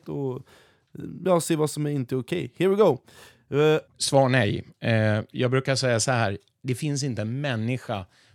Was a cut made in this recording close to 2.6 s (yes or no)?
no